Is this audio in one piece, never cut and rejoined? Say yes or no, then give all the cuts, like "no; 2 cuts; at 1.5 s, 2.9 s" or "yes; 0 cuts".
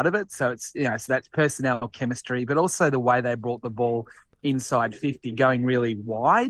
yes; 0 cuts